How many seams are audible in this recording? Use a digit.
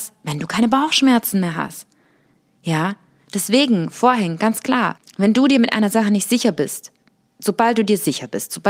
1